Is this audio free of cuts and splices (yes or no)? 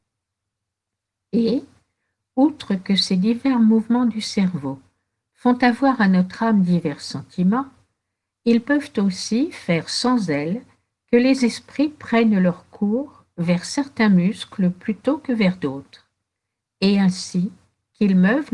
yes